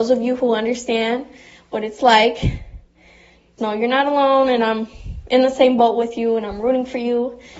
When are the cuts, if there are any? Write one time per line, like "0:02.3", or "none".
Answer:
0:03.6